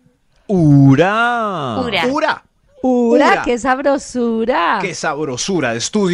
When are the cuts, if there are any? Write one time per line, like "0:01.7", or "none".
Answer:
none